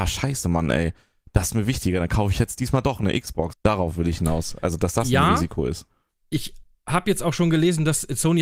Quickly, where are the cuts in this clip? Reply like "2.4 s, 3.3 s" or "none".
3.5 s